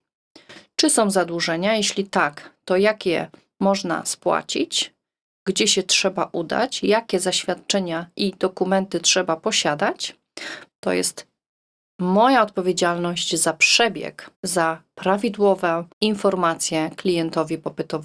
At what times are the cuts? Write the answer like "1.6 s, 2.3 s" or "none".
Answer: 10.7 s, 14.3 s, 15.9 s